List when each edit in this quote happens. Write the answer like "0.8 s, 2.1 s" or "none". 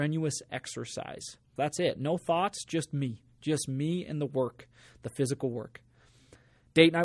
1.6 s